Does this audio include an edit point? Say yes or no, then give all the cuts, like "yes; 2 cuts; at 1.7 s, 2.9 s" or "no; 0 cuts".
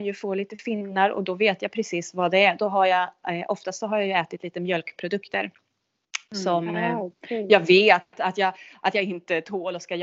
no; 0 cuts